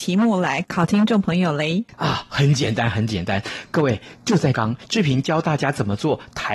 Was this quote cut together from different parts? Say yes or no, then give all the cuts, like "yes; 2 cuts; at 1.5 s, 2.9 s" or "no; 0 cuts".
yes; 1 cut; at 4.5 s